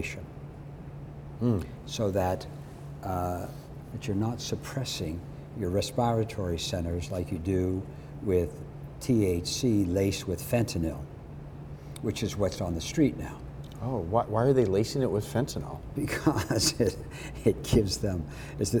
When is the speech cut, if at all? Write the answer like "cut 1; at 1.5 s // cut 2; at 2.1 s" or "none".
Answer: cut 1; at 3.9 s